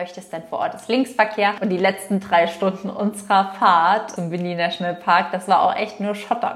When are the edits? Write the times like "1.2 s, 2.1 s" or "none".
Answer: none